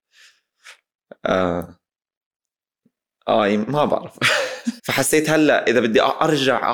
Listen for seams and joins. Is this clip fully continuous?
no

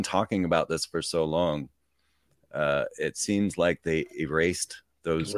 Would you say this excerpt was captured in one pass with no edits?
yes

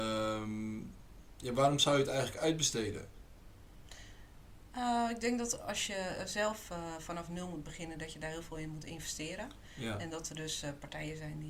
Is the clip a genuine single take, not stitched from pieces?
yes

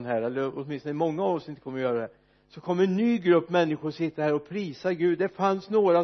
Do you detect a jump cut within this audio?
no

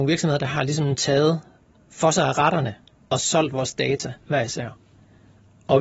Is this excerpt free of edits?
no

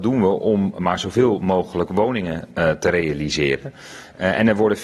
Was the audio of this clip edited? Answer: no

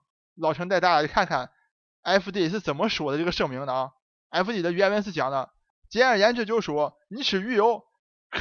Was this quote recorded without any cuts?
yes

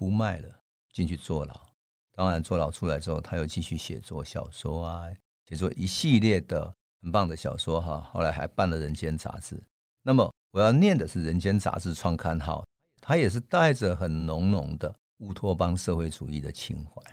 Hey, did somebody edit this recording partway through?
no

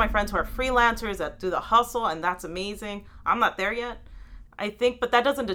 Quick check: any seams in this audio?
yes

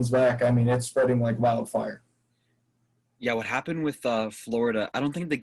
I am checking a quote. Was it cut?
no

